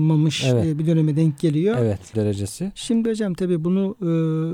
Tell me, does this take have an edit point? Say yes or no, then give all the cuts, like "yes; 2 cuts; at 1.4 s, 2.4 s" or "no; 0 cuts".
yes; 1 cut; at 2.1 s